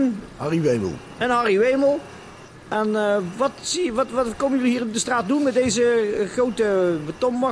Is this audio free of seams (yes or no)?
yes